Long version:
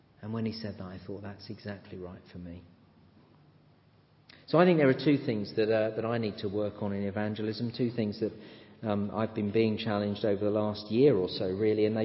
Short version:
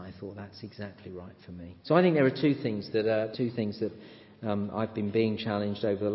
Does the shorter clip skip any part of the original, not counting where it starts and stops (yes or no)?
yes